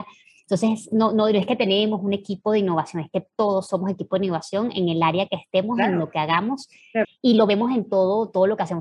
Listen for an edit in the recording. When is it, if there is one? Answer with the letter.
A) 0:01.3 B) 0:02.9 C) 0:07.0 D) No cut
C